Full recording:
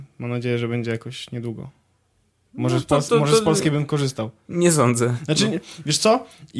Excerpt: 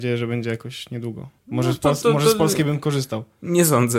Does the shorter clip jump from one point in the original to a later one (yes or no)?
yes